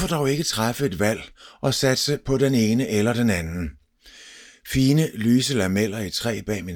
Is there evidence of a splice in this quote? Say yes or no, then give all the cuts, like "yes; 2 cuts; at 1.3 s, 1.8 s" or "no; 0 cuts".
no; 0 cuts